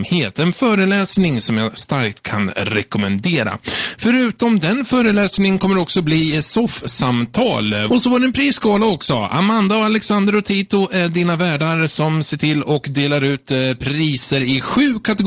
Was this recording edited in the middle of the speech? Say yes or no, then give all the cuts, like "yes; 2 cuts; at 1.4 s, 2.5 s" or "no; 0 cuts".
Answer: yes; 1 cut; at 7.9 s